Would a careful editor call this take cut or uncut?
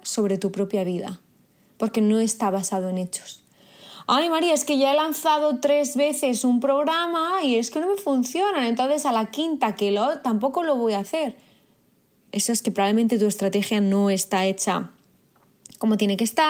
cut